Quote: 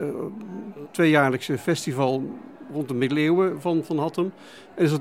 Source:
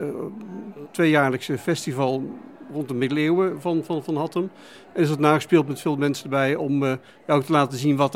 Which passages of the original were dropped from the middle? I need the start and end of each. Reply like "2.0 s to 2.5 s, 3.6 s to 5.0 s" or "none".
3.9 s to 4.0 s